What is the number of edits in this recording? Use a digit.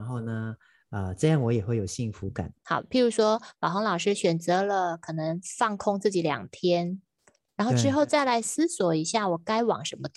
1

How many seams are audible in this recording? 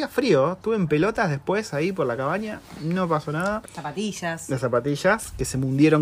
1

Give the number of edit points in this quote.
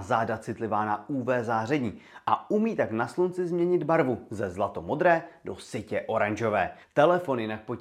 1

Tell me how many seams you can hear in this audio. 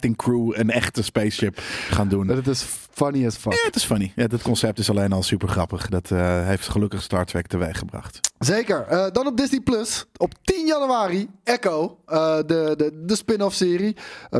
0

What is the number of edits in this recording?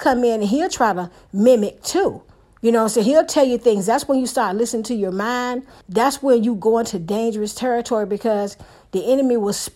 1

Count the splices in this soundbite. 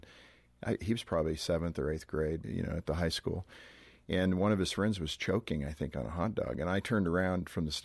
1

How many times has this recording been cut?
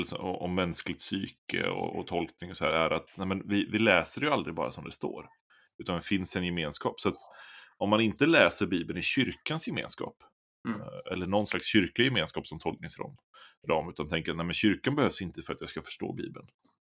0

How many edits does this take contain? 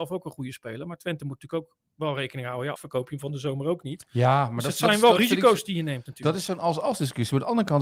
1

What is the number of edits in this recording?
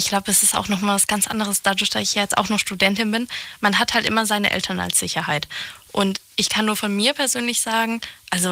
0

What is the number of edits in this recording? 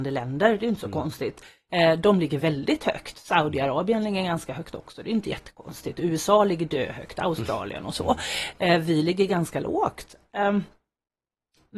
1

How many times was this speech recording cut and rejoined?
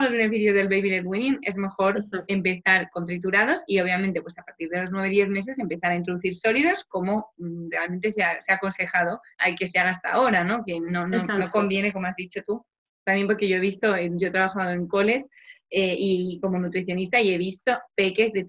1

